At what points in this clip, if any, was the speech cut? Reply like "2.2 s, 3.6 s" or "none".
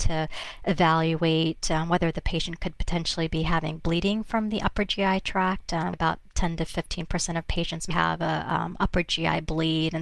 5.9 s, 7.9 s